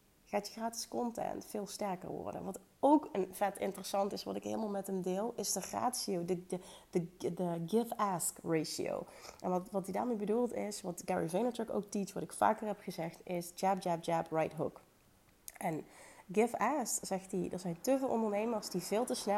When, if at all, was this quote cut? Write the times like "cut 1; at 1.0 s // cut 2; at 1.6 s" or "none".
none